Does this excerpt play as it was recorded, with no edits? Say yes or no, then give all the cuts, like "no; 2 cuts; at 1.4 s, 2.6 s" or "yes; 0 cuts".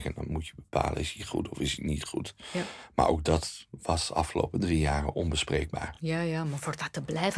yes; 0 cuts